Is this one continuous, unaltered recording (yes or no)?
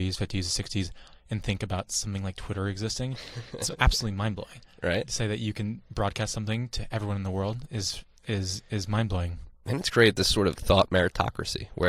no